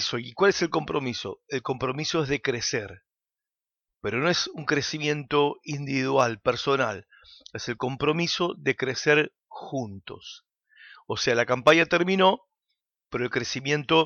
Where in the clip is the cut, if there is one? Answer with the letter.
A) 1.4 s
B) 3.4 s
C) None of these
C